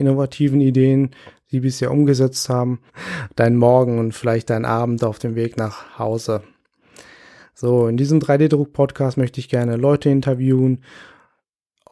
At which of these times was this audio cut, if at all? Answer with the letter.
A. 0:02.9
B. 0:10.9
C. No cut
A